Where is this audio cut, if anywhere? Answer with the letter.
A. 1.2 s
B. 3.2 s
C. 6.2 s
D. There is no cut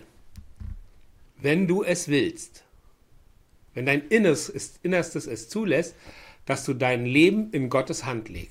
A